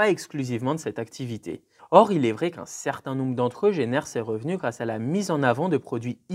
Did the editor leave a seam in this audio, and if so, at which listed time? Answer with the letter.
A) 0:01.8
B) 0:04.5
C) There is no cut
A